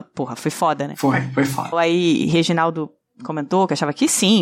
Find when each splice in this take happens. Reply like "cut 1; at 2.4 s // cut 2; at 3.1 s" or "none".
cut 1; at 1.7 s